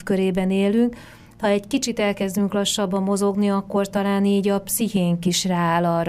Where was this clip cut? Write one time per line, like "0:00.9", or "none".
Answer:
none